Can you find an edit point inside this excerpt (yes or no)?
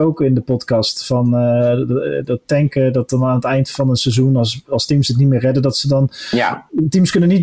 no